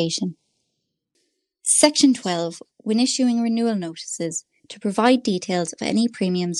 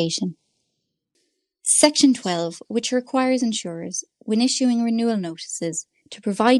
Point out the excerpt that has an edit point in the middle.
first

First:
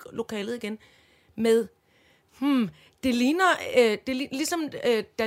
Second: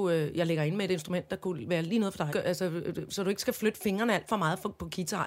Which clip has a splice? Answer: second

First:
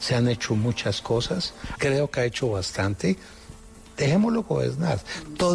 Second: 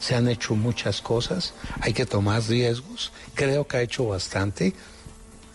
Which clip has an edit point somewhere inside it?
first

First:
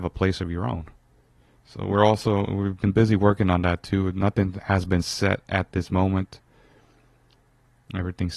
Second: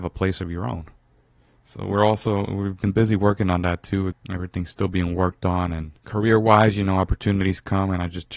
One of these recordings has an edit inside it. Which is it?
second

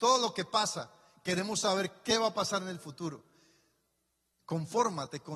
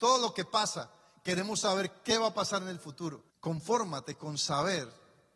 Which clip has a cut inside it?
second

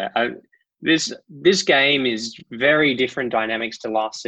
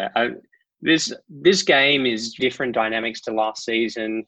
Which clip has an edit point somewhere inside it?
second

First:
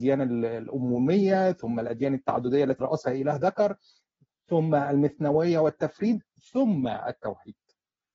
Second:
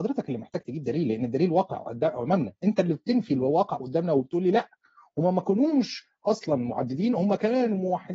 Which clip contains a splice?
first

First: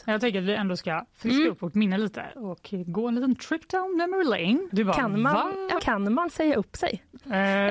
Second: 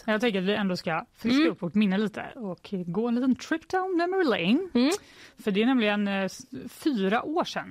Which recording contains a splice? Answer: first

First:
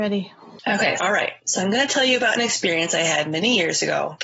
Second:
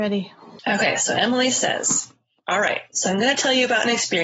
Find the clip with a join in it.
first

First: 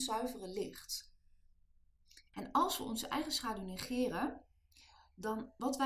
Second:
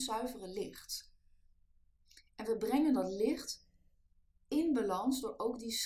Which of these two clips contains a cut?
first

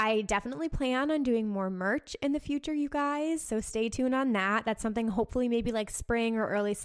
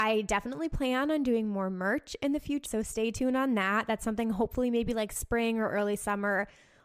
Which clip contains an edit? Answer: second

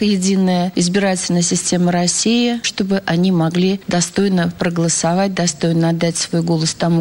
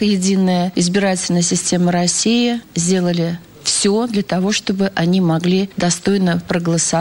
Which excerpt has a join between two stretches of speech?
first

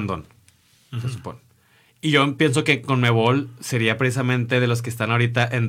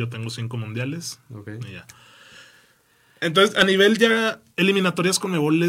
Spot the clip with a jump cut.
second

